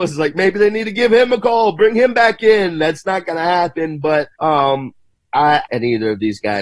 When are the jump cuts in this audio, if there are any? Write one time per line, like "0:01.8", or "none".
0:04.3
0:05.6